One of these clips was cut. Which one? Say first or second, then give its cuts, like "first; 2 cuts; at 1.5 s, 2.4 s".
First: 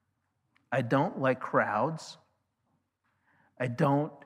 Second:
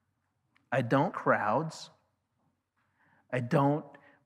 second; 1 cut; at 1.1 s